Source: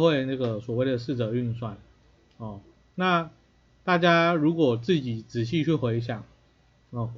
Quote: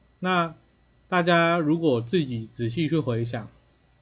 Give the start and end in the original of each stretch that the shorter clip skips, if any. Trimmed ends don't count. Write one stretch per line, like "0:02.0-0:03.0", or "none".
none